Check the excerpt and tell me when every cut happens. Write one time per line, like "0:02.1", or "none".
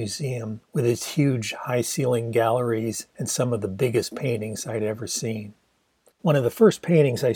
0:06.1